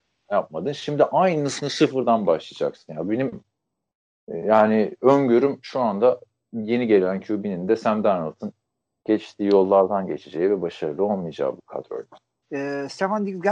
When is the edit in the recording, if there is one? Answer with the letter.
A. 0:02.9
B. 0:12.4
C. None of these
B